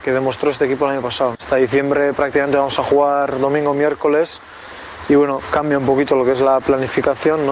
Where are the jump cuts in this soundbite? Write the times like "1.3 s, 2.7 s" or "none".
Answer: 1.3 s